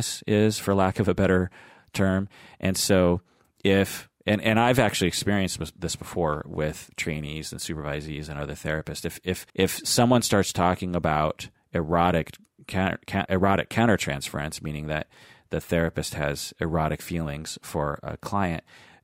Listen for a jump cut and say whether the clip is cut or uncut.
cut